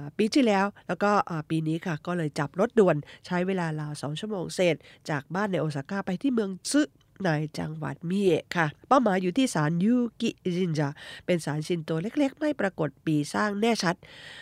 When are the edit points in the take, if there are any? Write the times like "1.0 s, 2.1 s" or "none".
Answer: 8.8 s